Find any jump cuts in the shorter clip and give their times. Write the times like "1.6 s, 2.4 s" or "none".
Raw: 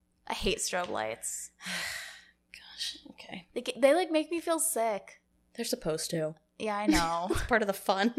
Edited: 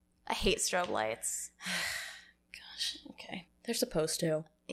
3.5 s